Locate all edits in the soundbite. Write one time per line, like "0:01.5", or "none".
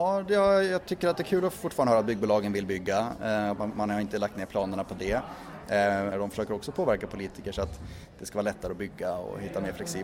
0:06.1

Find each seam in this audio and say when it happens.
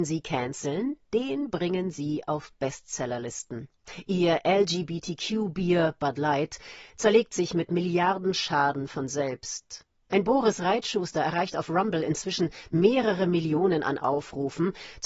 none

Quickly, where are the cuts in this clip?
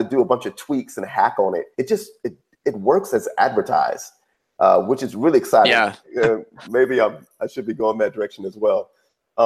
0:01.7
0:06.0

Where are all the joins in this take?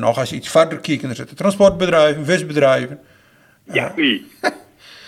0:04.0

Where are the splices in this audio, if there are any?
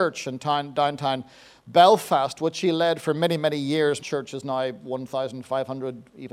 0:04.0

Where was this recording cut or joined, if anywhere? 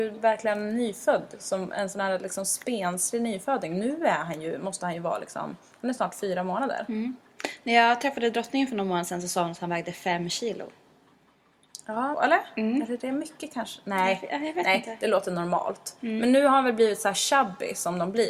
0:12.1

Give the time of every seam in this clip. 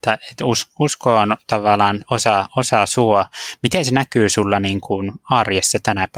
none

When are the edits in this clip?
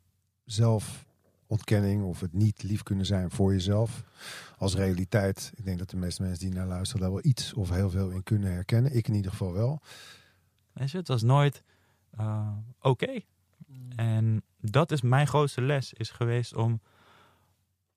0:10.6

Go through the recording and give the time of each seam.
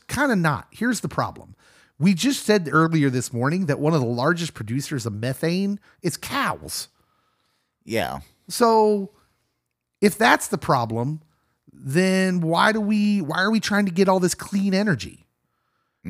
none

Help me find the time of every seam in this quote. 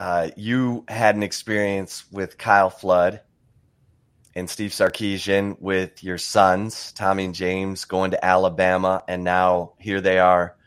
none

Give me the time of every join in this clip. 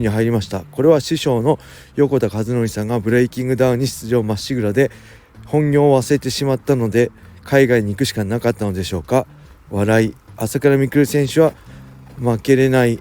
0:10.4

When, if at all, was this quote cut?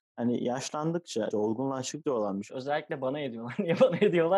0:01.3
0:02.5

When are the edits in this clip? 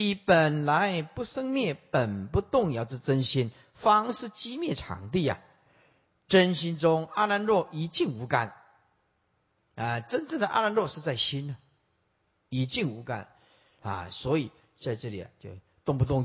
none

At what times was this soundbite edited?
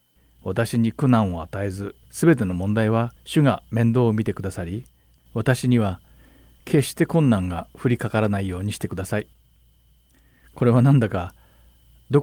0:02.0
0:03.2

